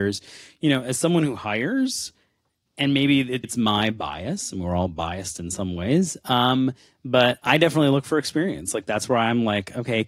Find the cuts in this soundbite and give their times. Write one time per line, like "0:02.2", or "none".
0:03.4